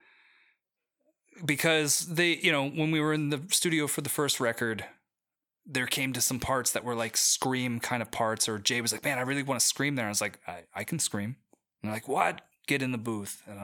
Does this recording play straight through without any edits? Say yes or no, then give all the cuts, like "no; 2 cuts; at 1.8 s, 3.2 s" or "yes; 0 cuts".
yes; 0 cuts